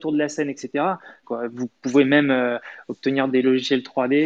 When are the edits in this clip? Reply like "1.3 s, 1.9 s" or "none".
1.2 s

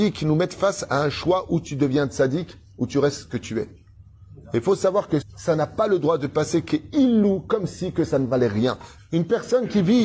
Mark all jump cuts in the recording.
5.2 s, 9.0 s

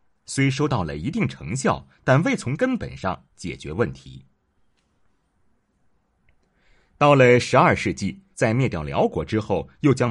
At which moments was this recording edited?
8.3 s

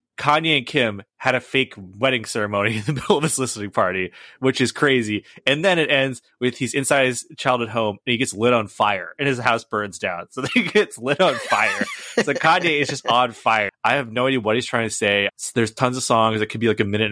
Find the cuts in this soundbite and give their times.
13.7 s, 15.3 s

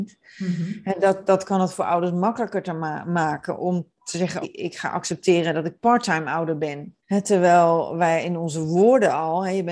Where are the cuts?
4.4 s, 7.0 s

